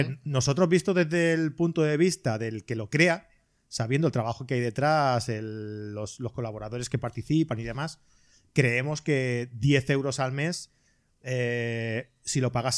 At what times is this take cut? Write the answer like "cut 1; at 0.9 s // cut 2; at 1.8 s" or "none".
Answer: none